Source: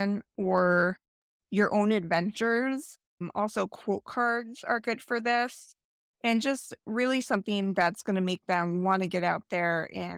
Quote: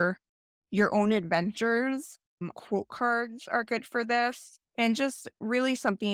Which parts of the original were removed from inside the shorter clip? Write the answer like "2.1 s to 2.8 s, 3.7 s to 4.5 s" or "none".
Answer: 3.3 s to 3.7 s, 5.8 s to 6.1 s